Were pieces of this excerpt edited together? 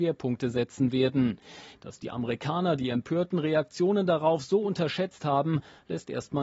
yes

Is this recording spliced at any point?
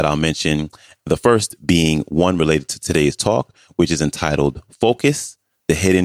no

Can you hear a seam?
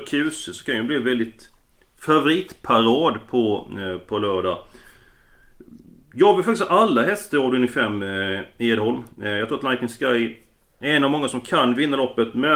no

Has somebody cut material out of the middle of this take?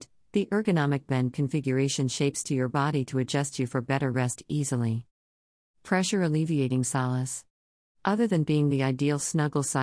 yes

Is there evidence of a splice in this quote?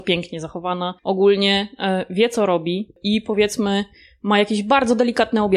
yes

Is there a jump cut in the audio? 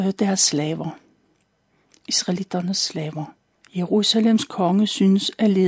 yes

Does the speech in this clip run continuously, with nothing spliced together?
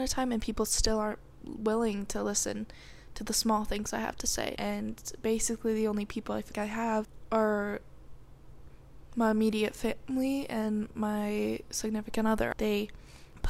no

